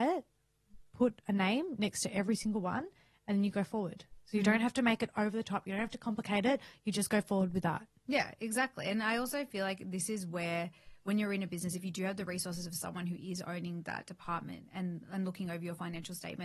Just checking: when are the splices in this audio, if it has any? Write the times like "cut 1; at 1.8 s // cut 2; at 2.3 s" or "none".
none